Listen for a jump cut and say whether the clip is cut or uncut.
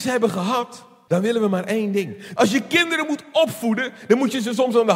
cut